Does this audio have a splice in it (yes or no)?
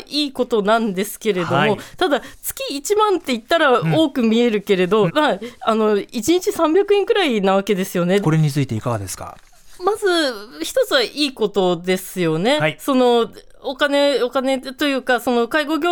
yes